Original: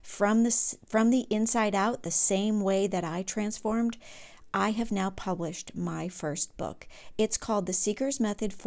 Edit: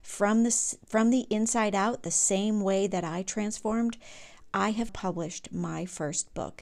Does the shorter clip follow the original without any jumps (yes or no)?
no